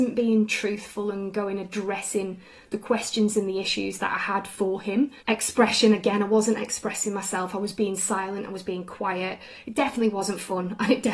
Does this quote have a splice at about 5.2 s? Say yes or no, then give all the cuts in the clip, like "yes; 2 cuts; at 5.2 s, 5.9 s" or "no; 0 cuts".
yes; 1 cut; at 5.2 s